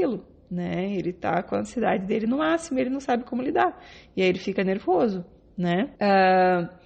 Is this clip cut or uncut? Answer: cut